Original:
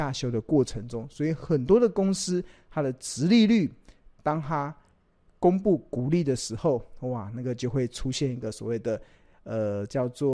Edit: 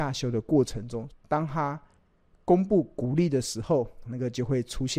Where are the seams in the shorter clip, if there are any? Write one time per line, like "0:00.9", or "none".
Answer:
0:01.1
0:04.1